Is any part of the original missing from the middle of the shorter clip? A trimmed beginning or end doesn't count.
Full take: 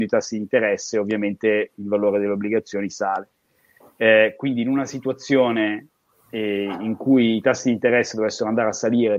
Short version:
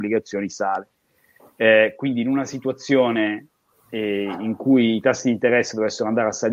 no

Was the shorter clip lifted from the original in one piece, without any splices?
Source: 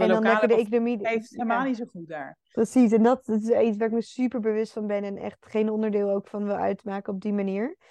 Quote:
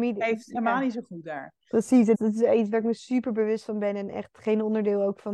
no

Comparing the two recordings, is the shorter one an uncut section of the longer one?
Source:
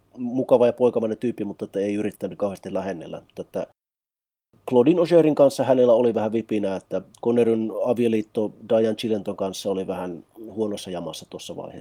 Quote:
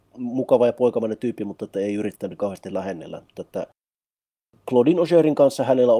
yes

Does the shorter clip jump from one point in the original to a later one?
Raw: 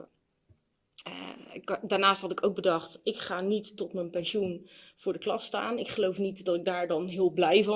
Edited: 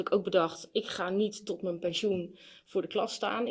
no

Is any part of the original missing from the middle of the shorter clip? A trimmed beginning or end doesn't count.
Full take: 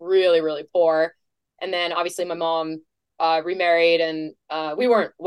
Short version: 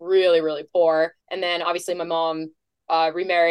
yes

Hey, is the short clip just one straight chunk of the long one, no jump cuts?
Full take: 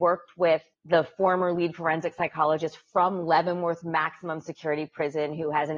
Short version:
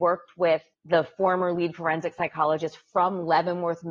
yes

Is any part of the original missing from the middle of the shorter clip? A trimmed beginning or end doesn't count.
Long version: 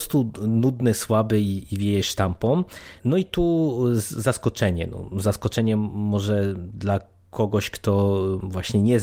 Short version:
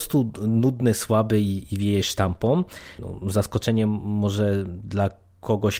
yes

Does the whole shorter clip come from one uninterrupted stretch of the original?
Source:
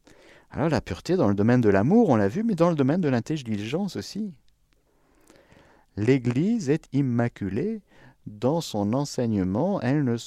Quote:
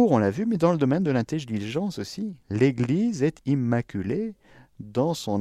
no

